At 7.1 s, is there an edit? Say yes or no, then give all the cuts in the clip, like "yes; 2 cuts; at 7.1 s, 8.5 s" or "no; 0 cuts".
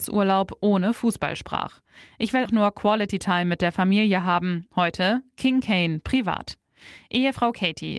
no; 2 cuts; at 2.5 s, 4.7 s